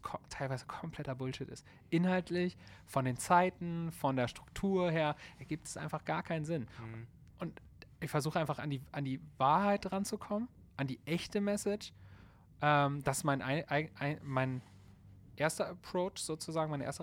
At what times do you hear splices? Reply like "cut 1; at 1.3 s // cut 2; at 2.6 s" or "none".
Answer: cut 1; at 7.3 s